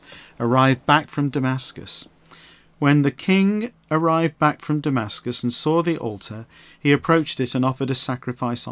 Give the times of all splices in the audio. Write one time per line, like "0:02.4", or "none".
none